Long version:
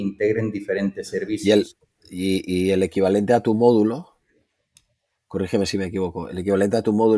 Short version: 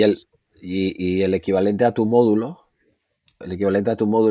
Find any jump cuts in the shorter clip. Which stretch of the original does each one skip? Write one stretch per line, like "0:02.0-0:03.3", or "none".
0:04.9-0:06.3